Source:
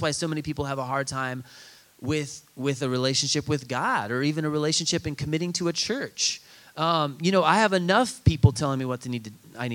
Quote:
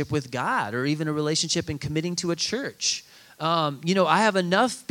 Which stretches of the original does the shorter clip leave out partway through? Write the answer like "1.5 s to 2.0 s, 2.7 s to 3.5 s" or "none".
none